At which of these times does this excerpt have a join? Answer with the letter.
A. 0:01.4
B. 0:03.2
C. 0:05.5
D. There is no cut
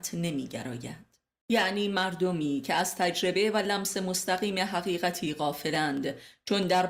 A